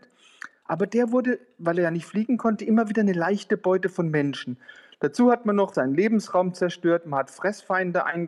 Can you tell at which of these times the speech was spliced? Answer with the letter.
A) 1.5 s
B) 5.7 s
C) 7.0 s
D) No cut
B